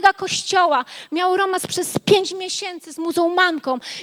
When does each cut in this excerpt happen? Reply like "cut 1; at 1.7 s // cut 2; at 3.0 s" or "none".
none